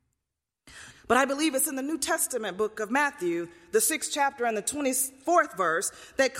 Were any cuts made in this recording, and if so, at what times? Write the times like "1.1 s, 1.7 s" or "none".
0.9 s